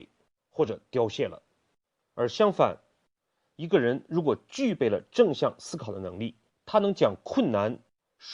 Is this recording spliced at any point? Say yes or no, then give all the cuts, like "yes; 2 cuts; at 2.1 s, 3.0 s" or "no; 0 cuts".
yes; 1 cut; at 6.5 s